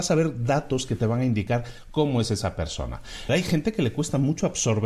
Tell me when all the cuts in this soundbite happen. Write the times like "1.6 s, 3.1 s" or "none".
3.3 s

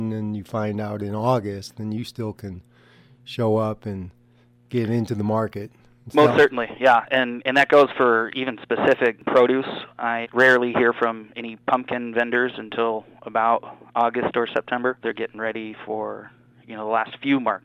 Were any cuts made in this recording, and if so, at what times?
10.2 s, 15.0 s

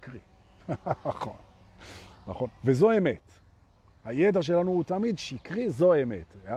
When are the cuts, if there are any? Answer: none

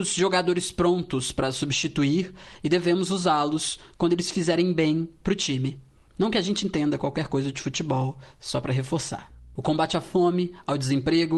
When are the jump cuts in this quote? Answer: 9.6 s

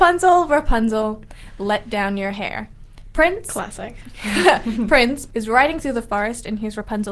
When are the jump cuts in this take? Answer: 5.3 s

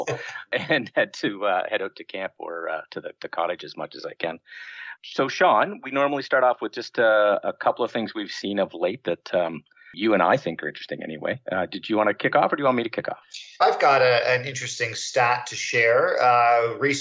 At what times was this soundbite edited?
13.6 s

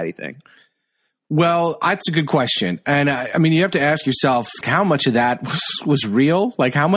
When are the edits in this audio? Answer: 4.6 s

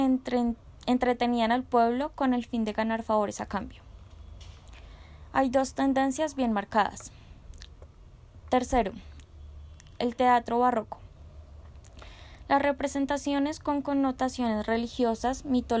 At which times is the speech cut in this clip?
8.4 s

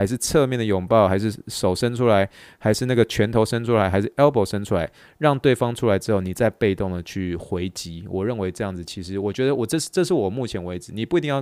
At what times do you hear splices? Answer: none

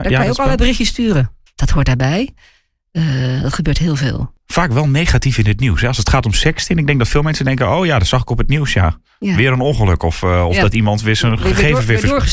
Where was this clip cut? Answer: 1.5 s

